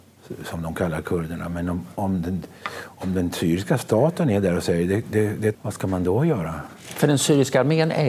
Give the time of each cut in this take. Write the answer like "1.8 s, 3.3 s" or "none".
5.5 s